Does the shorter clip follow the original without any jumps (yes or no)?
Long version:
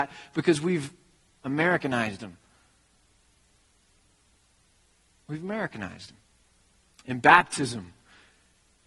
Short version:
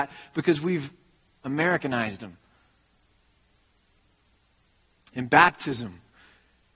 no